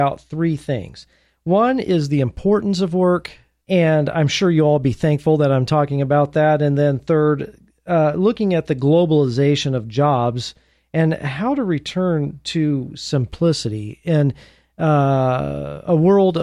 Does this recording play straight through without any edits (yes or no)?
no